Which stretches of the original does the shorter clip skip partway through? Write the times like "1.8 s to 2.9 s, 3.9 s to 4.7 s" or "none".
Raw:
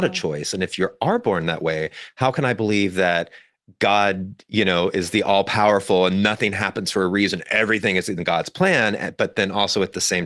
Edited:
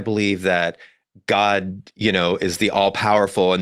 none